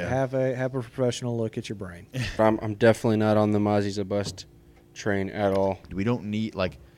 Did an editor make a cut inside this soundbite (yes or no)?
yes